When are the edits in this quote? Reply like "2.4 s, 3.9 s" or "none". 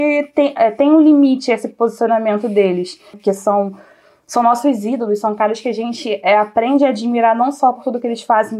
3.1 s